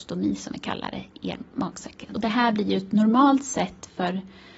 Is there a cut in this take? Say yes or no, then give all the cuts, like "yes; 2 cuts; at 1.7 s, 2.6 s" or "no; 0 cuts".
no; 0 cuts